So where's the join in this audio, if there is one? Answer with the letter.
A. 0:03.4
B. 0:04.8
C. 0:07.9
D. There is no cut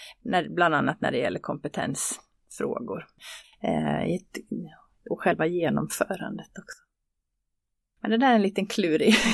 A